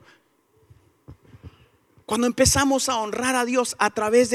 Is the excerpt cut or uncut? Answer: cut